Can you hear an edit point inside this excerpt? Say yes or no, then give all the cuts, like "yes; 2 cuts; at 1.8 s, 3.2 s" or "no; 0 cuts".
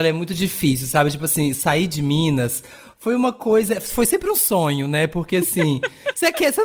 no; 0 cuts